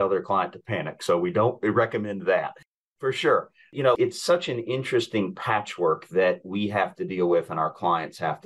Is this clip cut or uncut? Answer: cut